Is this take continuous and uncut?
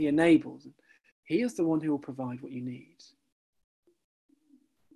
no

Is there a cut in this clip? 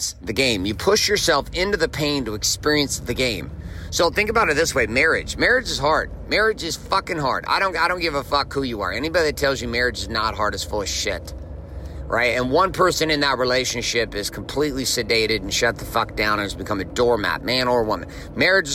no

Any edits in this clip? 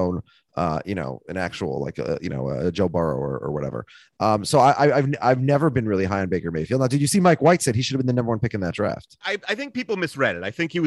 no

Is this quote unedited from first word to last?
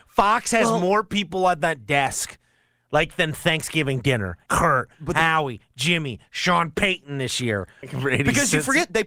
no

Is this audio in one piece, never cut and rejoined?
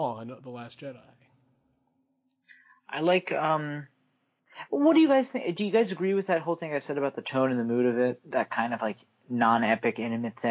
yes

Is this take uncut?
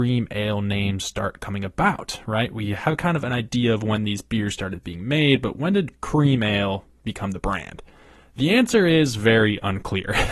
yes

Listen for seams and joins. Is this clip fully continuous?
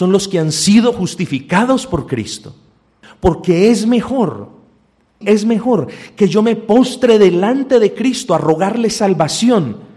no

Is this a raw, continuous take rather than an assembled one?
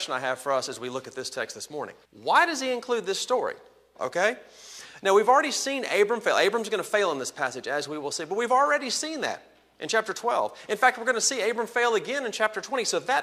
no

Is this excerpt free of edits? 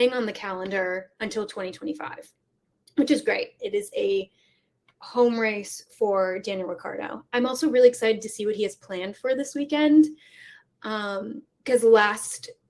no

